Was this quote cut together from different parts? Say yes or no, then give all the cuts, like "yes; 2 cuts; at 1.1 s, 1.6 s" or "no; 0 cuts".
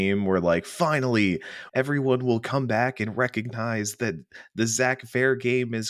yes; 1 cut; at 1.7 s